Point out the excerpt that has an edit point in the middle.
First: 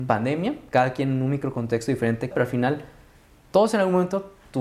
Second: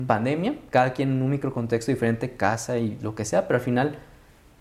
first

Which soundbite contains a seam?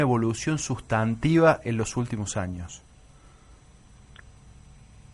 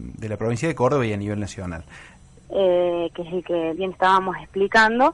second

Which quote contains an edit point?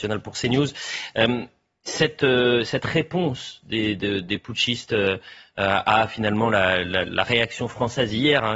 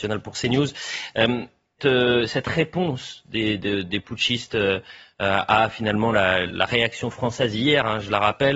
second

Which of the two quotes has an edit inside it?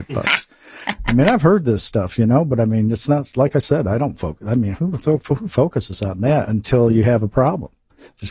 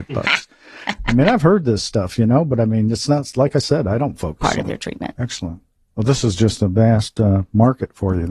second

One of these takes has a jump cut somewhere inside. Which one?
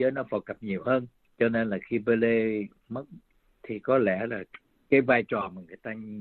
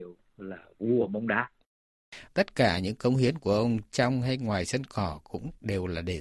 second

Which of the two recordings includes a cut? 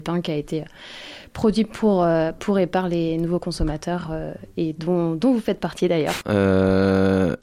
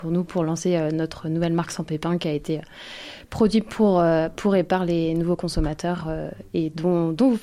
first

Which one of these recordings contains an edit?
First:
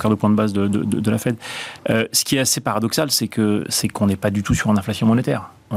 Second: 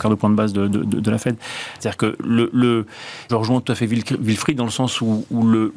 second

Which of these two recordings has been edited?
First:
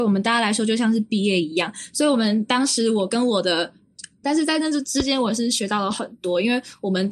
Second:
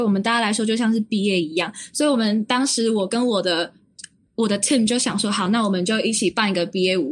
first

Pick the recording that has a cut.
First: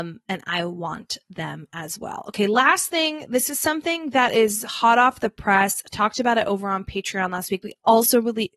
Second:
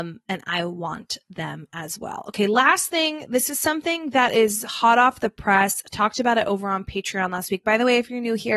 first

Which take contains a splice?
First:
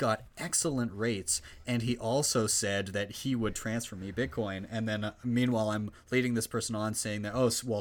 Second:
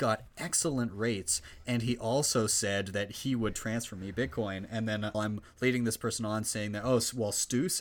second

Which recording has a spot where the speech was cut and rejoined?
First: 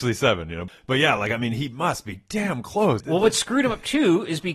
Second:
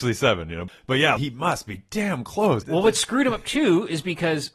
second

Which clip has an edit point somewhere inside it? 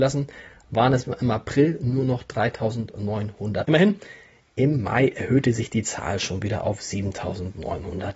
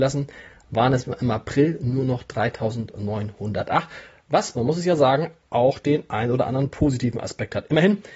first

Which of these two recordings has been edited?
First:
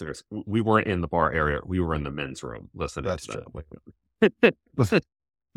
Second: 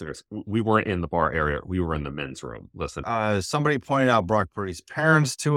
second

